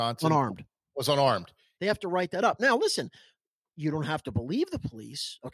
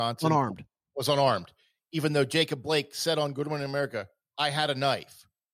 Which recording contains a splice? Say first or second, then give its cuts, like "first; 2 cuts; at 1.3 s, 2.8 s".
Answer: first; 1 cut; at 1.8 s